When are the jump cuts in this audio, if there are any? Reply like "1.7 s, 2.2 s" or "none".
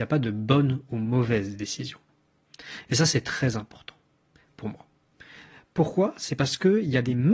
none